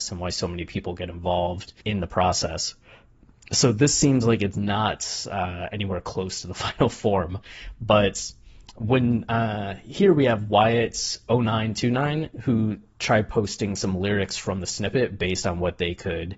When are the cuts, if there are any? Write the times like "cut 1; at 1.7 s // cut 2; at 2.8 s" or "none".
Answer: cut 1; at 1.8 s